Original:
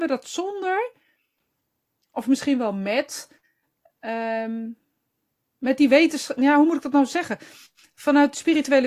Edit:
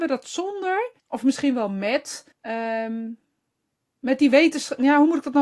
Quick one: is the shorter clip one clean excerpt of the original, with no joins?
no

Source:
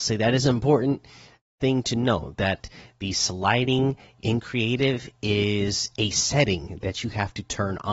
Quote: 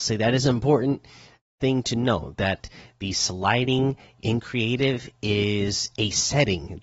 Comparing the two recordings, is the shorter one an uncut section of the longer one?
yes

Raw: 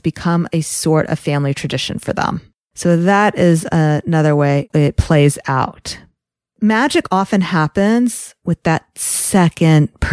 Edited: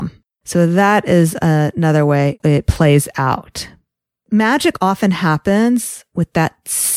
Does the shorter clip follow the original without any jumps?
yes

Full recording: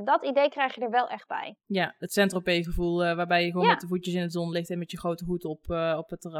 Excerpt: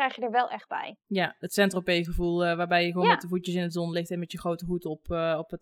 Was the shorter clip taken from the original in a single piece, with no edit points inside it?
yes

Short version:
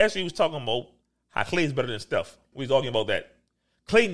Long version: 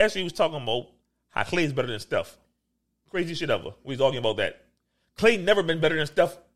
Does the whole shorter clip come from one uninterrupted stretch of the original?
no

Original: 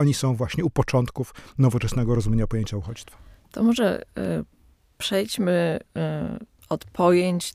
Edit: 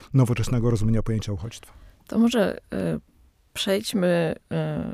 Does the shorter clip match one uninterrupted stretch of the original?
yes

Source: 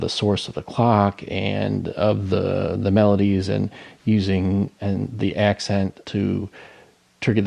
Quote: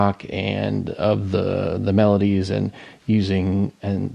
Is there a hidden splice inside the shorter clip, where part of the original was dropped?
no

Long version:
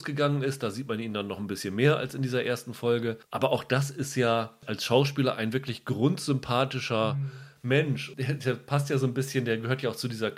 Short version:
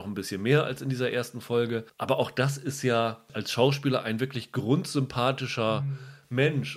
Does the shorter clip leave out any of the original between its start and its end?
no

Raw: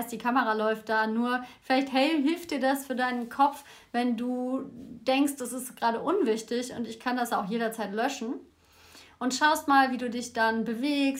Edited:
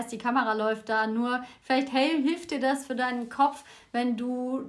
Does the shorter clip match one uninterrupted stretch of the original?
yes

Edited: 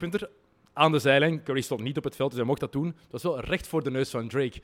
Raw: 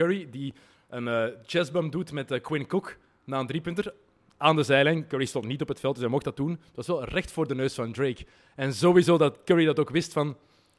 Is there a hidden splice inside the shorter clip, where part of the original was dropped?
no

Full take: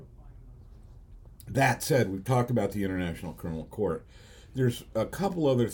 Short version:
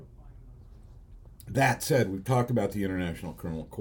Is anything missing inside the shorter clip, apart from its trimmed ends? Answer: no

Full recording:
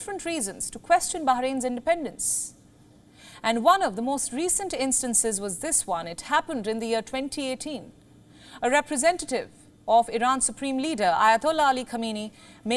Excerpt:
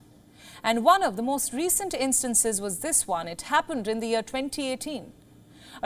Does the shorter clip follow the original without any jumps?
yes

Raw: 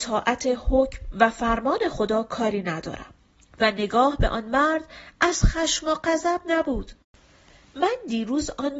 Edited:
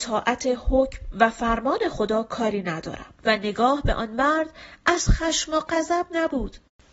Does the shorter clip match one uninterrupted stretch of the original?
no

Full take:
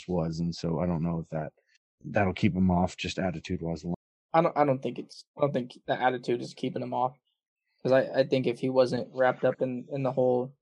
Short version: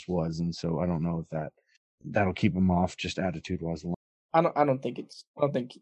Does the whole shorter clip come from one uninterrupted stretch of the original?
yes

